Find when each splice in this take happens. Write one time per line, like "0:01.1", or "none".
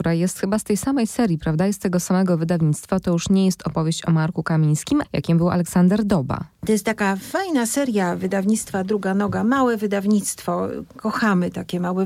0:05.0

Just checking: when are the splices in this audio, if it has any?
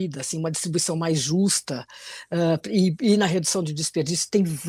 none

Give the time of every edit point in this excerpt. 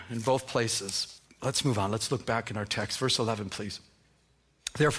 none

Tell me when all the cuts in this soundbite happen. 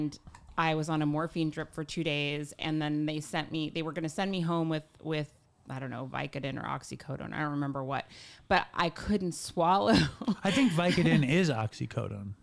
none

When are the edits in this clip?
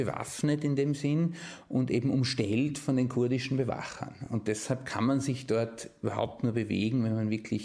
none

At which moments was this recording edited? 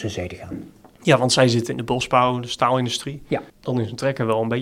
0:03.5

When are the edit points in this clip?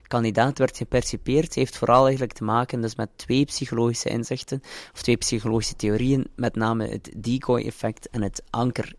none

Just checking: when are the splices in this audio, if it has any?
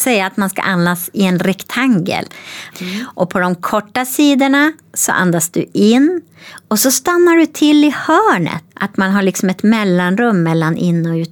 0:02.7
0:08.7

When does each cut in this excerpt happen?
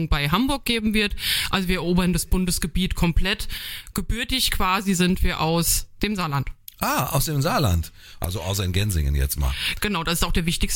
0:08.2

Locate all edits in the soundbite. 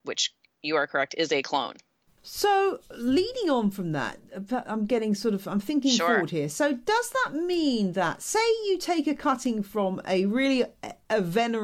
none

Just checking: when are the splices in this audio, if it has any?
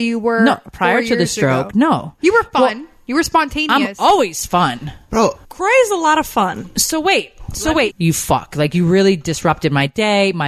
0:05.4
0:07.9

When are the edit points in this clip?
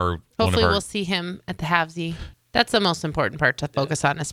0:02.3

